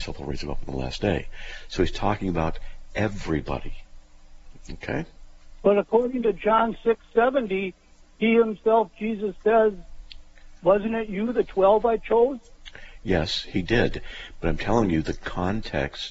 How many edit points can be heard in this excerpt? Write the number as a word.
zero